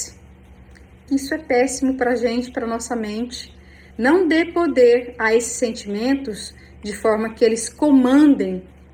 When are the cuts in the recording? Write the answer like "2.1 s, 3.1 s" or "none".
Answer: 1.1 s, 3.9 s